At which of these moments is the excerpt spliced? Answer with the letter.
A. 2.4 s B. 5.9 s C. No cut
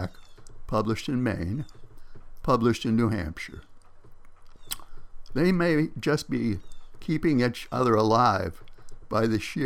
A